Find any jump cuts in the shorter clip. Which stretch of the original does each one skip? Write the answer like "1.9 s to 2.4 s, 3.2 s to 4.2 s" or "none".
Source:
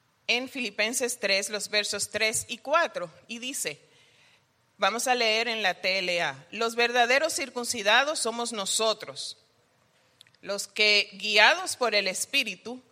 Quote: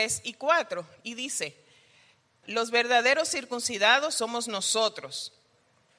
4.7 s to 6.5 s